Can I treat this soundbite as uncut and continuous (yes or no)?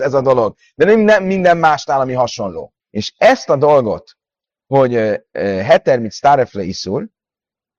no